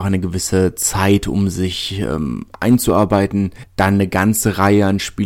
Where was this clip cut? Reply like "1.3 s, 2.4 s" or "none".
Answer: none